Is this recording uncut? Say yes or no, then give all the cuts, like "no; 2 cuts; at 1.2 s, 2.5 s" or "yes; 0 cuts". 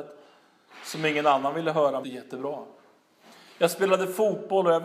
no; 1 cut; at 2.0 s